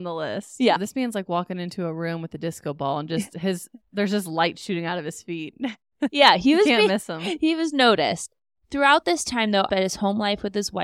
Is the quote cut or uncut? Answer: cut